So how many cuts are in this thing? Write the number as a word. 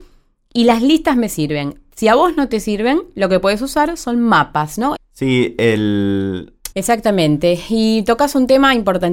two